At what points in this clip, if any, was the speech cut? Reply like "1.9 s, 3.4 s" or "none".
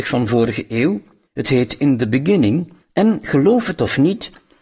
1.3 s, 2.8 s